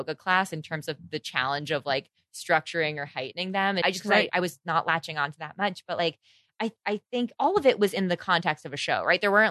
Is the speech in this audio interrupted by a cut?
yes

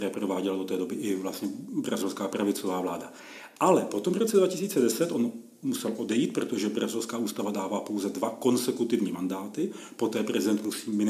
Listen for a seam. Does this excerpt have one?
no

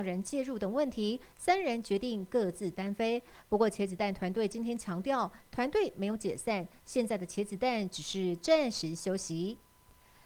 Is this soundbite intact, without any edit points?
yes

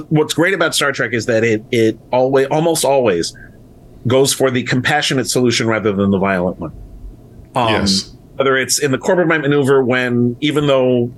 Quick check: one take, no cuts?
yes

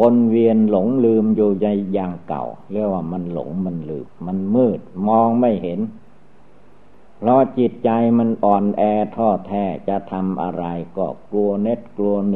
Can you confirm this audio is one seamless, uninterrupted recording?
no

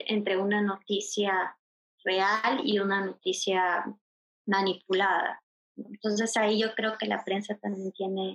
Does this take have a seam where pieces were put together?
no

